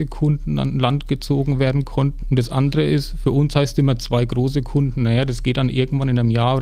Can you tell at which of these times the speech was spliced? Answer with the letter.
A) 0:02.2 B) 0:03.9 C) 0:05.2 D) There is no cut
A